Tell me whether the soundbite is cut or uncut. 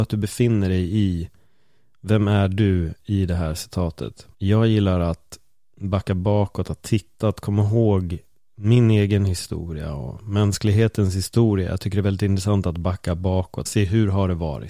cut